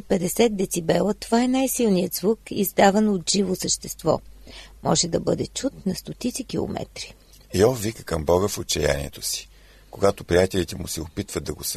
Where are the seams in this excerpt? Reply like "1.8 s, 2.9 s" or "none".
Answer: none

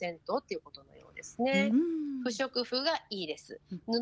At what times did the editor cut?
1.7 s

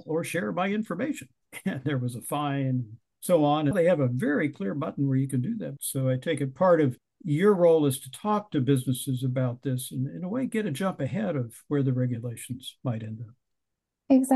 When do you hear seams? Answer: 3.7 s, 5.8 s

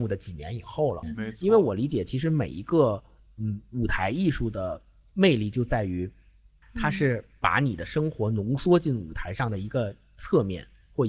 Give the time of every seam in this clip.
1.0 s, 6.6 s

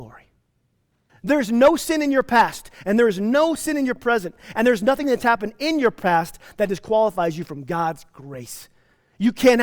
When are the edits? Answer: 1.1 s

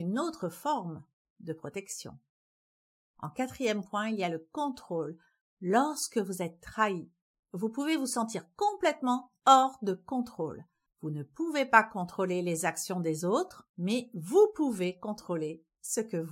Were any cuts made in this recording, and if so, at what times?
10.9 s, 13.7 s

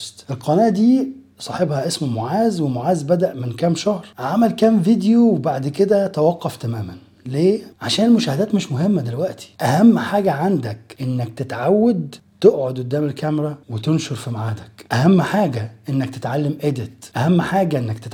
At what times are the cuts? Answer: 7.7 s, 13.6 s

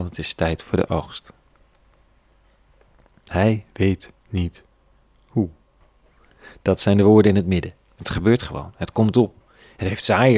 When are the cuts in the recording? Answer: 8.0 s

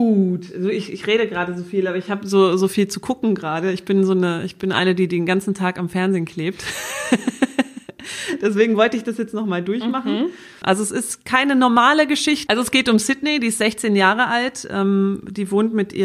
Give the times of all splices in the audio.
10.6 s, 12.5 s

